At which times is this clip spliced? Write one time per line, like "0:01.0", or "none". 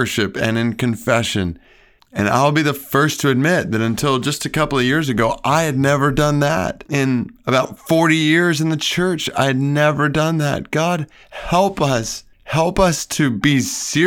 0:12.3